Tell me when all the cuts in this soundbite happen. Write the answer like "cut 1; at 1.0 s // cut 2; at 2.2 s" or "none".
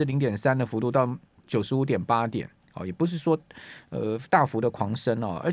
cut 1; at 4.3 s